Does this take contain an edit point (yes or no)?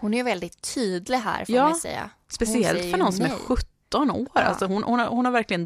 no